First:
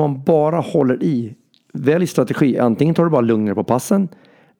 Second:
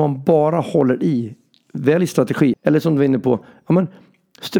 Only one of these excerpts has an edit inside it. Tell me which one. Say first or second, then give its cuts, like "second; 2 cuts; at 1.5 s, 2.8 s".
second; 1 cut; at 2.5 s